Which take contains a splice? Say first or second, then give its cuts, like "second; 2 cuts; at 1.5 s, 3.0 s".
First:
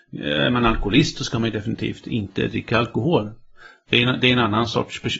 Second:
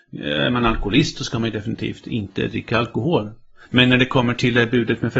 second; 1 cut; at 3.7 s